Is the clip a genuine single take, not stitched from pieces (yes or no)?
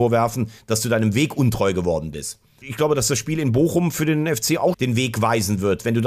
no